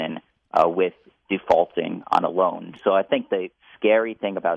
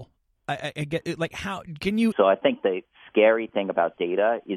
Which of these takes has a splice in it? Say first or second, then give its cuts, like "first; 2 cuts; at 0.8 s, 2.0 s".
second; 1 cut; at 2.1 s